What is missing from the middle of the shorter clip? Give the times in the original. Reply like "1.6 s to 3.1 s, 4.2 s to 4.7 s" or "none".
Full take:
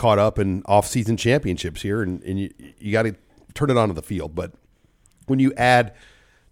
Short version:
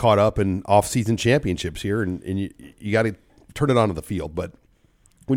none